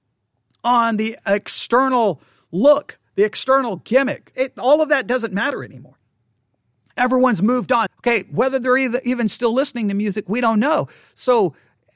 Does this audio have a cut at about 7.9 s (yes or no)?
yes